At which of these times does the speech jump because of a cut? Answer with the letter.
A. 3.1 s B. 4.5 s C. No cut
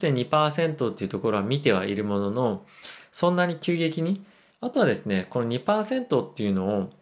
B